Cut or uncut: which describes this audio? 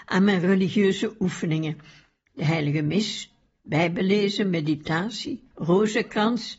cut